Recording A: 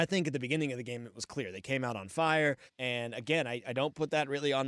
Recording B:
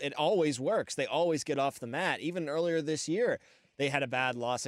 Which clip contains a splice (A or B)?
A